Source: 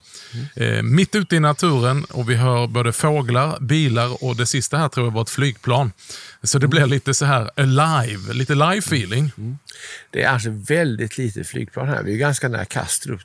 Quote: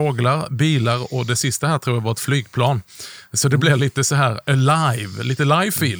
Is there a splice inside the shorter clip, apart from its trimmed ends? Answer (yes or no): no